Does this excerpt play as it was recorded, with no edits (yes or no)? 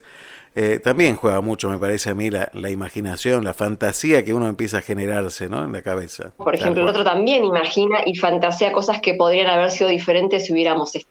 no